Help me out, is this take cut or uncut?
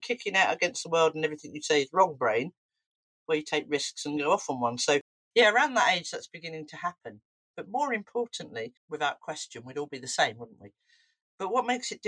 cut